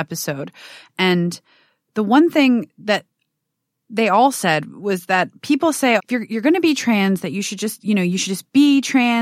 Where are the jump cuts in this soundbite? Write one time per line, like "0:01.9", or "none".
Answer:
0:06.0